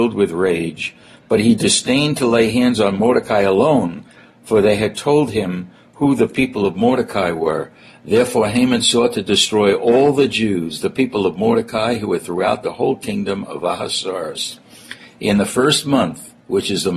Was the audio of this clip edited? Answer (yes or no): no